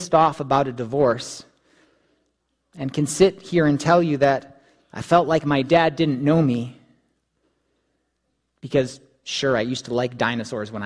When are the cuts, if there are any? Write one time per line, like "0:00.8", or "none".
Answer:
none